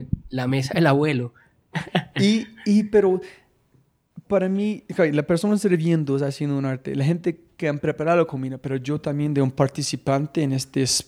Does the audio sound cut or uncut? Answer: uncut